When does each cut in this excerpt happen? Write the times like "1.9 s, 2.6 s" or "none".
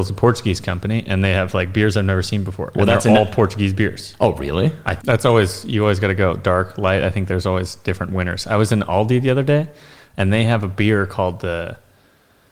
5.0 s